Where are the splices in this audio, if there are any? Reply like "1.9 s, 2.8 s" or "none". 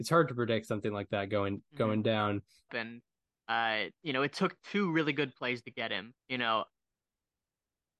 2.7 s, 6.2 s